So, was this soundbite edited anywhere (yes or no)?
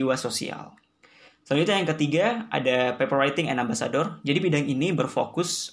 no